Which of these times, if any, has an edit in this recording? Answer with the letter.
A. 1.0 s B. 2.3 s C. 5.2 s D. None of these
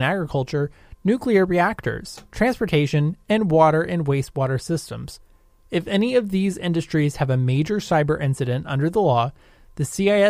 D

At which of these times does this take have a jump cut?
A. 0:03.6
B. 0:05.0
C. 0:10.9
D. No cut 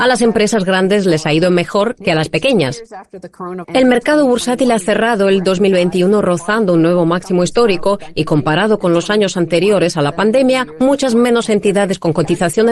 A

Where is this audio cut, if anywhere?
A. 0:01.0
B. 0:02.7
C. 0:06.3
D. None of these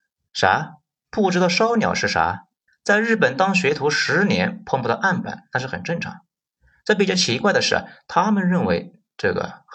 B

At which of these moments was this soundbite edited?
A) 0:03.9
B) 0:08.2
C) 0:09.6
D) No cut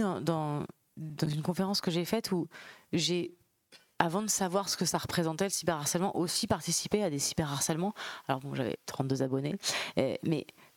D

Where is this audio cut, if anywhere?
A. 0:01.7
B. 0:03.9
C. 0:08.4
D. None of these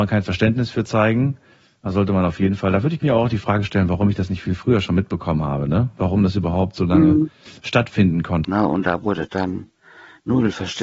C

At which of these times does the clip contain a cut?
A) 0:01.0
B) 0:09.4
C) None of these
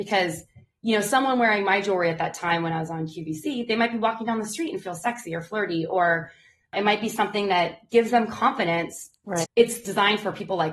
B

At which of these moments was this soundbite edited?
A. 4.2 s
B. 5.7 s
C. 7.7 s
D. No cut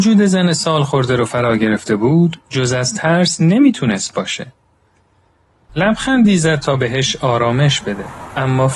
B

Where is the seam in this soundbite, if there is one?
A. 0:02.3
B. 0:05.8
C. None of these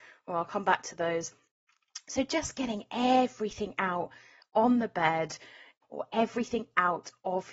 B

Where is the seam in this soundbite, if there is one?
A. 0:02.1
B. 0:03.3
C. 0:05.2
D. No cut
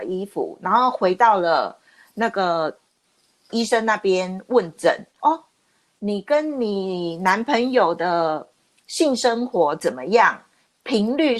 C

